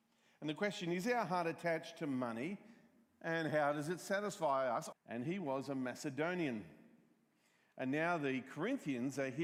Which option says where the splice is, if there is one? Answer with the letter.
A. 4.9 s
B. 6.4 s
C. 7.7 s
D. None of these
A